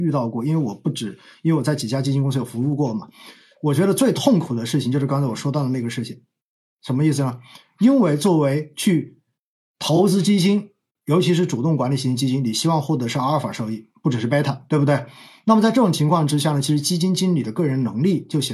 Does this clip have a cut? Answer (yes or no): no